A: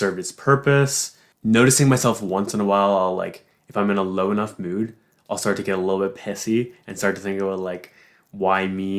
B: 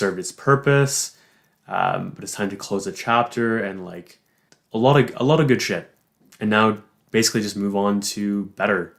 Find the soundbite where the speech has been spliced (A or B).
A